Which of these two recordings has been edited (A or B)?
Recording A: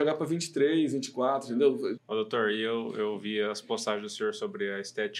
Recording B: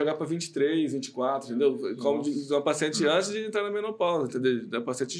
A